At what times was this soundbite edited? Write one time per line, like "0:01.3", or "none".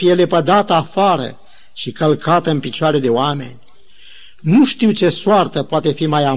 none